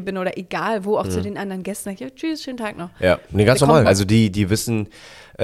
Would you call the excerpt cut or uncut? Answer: cut